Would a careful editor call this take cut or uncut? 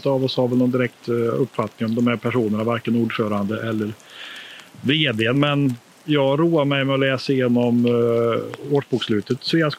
uncut